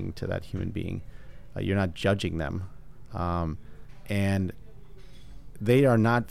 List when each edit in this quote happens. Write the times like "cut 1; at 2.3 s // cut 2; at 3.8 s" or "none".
none